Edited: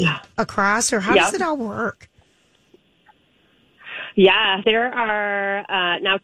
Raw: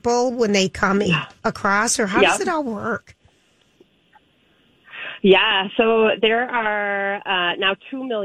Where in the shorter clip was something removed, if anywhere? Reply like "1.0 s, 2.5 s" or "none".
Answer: 4.6 s